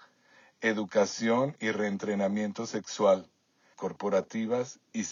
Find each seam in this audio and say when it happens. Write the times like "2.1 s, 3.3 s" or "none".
3.7 s